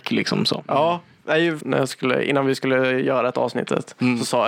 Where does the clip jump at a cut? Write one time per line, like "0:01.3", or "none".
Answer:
0:01.6

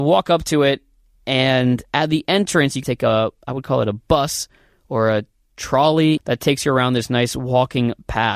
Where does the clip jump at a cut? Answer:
0:02.8
0:06.2

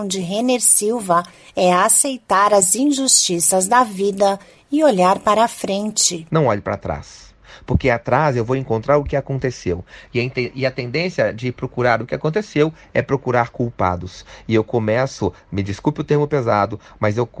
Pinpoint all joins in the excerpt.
none

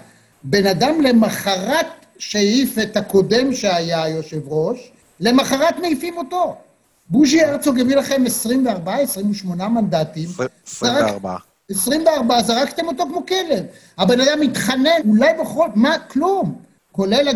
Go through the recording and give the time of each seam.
0:15.0

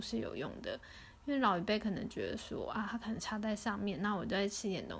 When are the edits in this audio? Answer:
none

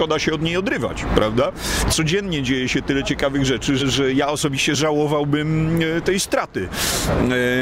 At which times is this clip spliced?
0:03.8

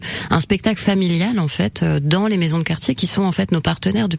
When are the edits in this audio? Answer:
none

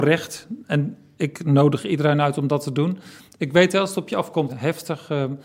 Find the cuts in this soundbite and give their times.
0:04.5

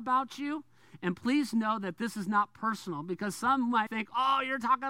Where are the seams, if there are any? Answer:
0:03.9

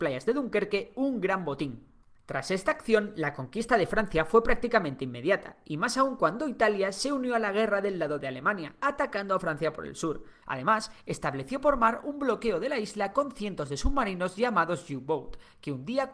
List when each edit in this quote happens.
0:10.4

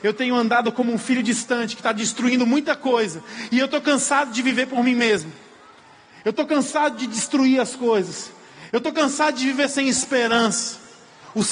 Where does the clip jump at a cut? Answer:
none

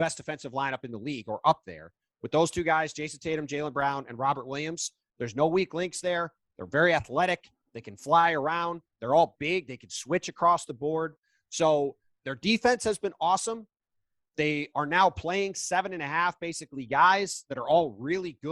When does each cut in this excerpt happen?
none

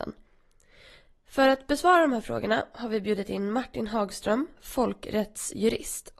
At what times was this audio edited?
0:04.6

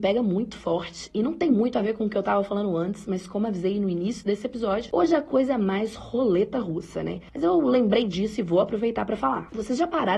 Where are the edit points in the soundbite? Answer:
none

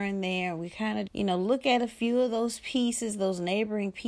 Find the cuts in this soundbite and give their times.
0:01.1

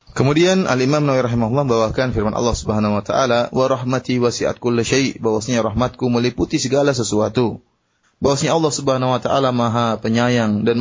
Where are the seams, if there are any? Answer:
0:03.5
0:08.0

